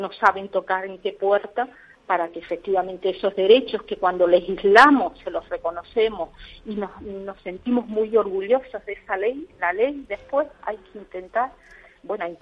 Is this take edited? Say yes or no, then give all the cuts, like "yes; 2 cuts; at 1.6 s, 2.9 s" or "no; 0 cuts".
no; 0 cuts